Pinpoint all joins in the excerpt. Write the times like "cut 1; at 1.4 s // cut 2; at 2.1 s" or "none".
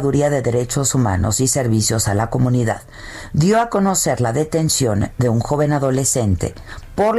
none